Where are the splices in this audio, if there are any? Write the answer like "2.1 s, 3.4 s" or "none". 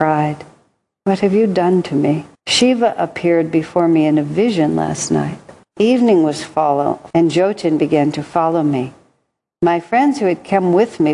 2.3 s, 5.6 s, 7.1 s